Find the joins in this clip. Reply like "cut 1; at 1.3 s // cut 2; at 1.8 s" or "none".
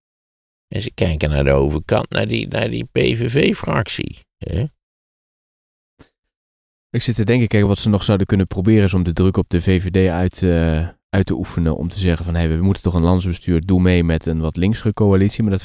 none